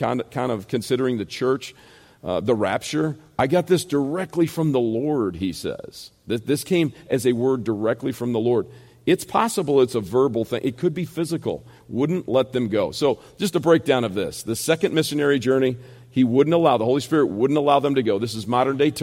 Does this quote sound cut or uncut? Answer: uncut